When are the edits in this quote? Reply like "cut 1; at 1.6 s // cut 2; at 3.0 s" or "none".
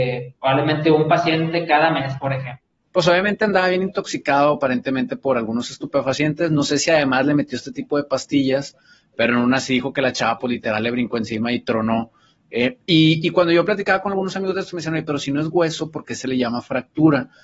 cut 1; at 2.9 s

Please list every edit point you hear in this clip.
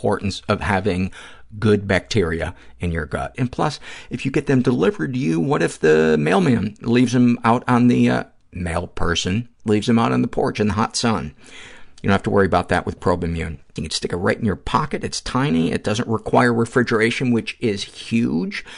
cut 1; at 3.3 s // cut 2; at 13.8 s

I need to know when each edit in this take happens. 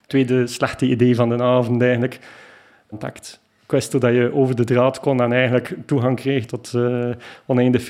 cut 1; at 2.9 s // cut 2; at 6.5 s

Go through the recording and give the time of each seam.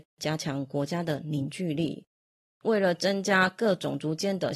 cut 1; at 2.5 s

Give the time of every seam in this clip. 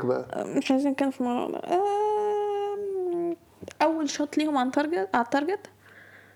none

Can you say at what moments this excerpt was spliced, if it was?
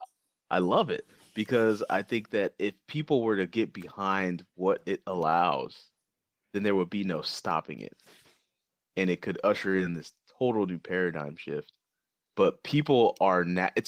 none

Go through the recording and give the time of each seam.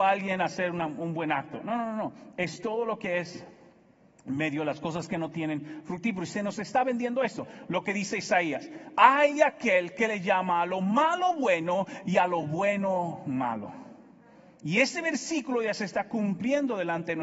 none

